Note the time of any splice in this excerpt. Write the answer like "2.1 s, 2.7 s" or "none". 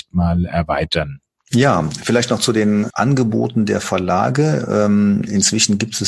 none